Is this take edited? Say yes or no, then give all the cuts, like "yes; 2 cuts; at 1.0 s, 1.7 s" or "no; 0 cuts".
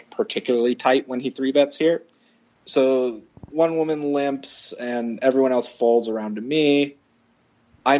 yes; 1 cut; at 2.5 s